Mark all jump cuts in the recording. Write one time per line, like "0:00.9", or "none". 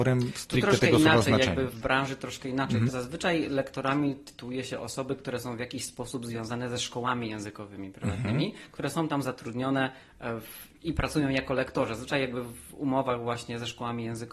0:01.7
0:02.9